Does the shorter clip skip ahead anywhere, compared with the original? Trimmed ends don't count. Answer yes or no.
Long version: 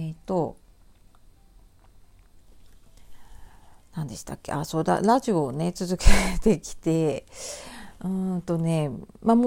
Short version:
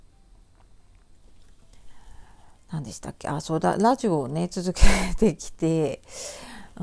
no